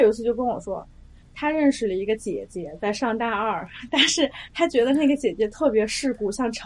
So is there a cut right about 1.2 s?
no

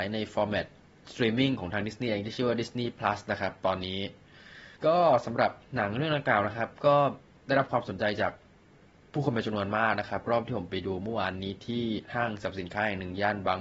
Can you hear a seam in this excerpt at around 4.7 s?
yes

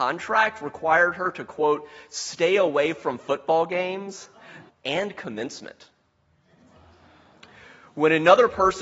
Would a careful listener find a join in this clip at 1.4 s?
no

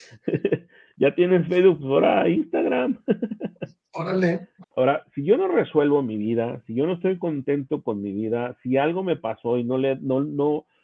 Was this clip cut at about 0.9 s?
no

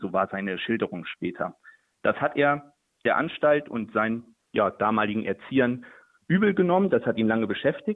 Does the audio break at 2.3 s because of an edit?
no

